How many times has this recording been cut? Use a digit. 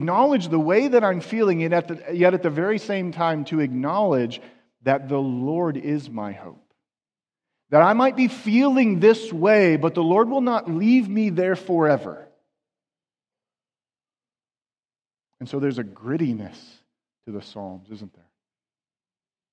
0